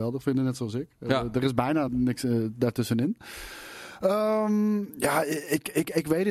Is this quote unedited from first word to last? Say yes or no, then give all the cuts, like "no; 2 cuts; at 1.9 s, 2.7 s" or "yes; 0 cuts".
no; 1 cut; at 1.9 s